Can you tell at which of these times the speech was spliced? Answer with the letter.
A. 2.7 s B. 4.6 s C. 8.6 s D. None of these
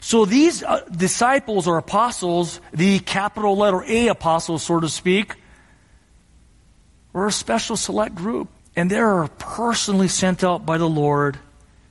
C